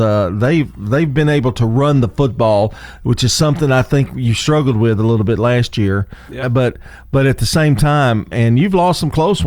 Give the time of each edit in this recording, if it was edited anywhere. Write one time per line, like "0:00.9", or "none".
0:06.4
0:08.3